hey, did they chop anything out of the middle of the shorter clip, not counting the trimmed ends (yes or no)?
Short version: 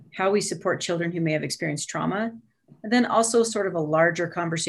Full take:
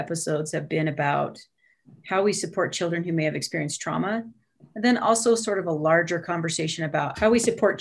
no